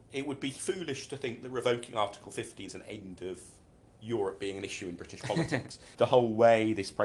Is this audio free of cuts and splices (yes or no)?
no